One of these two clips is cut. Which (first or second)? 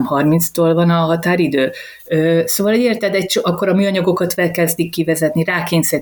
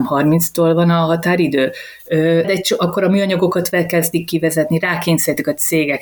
second